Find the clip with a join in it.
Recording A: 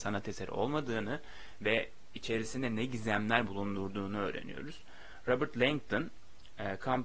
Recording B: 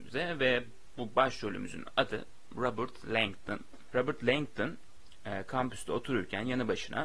B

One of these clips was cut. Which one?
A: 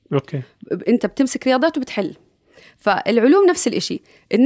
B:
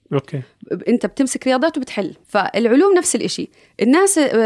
B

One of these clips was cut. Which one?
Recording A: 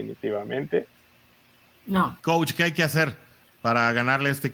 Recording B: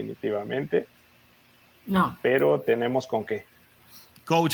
A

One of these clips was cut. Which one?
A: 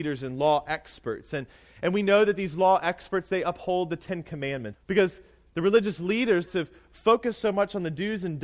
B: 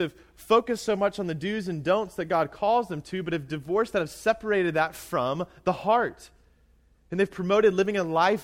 A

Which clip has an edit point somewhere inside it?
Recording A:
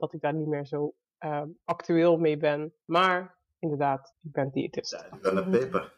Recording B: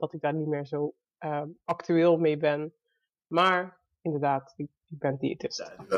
A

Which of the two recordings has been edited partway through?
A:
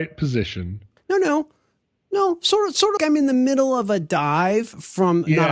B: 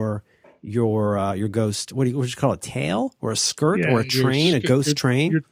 A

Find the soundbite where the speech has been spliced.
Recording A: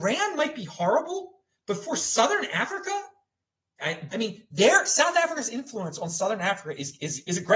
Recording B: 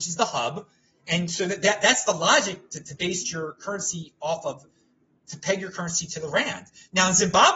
A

